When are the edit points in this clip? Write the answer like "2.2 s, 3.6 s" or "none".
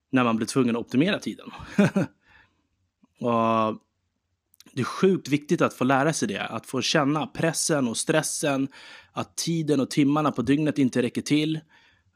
none